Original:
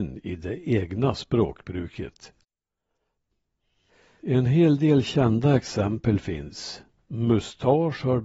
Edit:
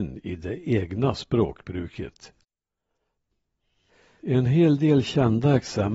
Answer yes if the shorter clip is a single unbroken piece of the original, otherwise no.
yes